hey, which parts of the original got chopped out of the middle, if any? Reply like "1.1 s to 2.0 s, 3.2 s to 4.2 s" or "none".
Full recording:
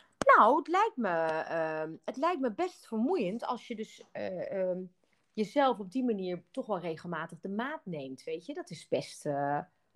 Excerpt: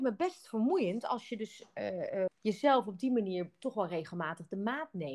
4.7 s to 5.2 s